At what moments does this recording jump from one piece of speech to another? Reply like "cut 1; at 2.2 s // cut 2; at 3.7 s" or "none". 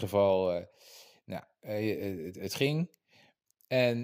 none